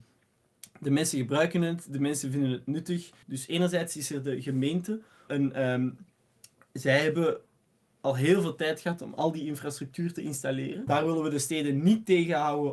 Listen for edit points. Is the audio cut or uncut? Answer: cut